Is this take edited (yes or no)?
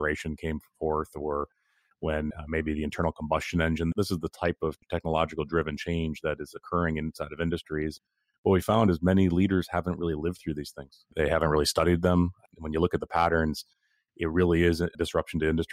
no